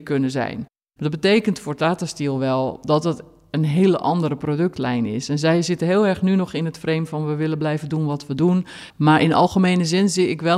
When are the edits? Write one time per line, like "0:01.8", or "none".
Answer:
0:08.9